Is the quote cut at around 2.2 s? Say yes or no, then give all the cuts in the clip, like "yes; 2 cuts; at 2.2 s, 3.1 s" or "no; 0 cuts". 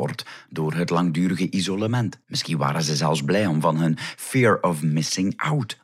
yes; 1 cut; at 2.2 s